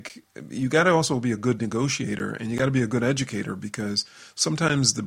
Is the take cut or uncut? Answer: uncut